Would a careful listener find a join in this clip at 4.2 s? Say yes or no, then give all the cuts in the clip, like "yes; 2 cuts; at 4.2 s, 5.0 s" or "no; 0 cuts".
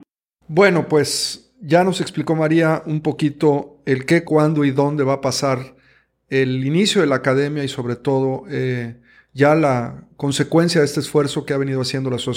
yes; 1 cut; at 4.2 s